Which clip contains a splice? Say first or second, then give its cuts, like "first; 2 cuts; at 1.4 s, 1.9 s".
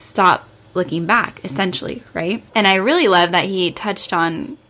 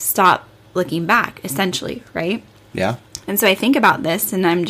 first; 1 cut; at 2.5 s